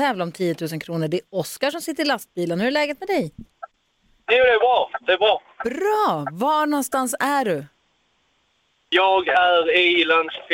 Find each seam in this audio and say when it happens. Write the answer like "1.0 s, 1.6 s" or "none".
none